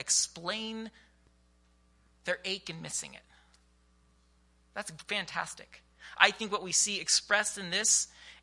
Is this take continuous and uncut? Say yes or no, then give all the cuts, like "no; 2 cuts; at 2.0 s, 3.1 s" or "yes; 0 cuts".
no; 1 cut; at 6.1 s